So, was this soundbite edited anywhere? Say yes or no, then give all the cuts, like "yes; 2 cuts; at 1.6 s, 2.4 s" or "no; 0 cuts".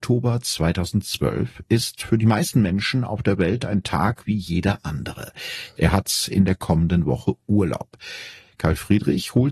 yes; 1 cut; at 5.8 s